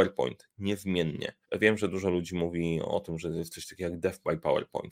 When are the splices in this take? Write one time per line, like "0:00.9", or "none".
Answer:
0:01.4